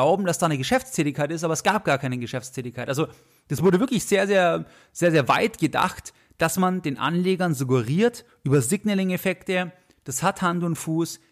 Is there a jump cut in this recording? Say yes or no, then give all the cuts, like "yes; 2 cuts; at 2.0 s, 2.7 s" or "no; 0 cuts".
no; 0 cuts